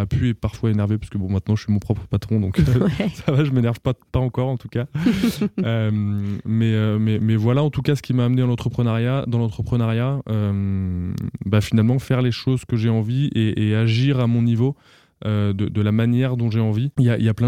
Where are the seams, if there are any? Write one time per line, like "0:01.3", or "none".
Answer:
none